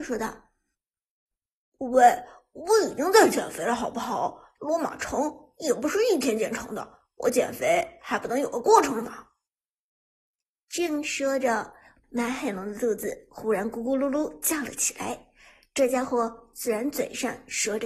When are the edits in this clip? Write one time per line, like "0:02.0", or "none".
0:04.6

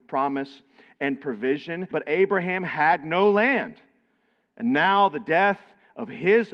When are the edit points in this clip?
0:01.9

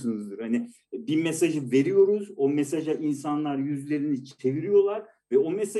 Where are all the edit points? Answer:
none

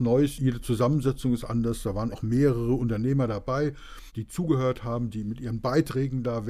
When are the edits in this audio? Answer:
0:02.1
0:05.1

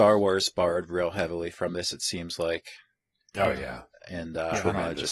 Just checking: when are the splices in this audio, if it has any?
none

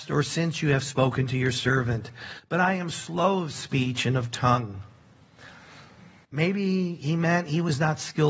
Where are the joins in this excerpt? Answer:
0:06.2

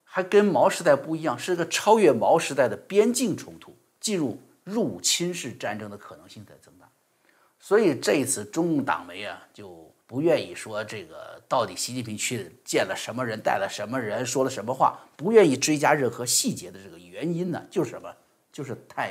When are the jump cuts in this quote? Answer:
0:10.0

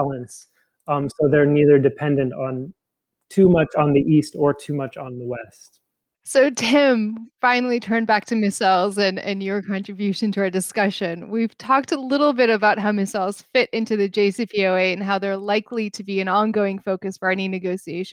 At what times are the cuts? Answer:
none

